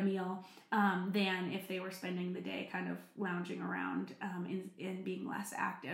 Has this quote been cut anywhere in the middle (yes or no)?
no